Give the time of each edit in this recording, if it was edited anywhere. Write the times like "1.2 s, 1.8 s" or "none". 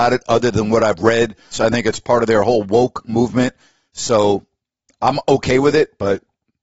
1.5 s

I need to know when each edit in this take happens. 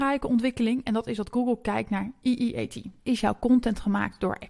3.0 s

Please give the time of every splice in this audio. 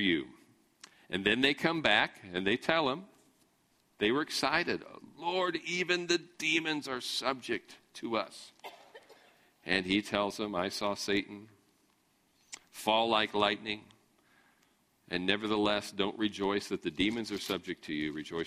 none

